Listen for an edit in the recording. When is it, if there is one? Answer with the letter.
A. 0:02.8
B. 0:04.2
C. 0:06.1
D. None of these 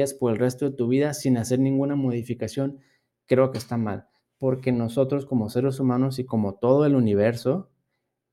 D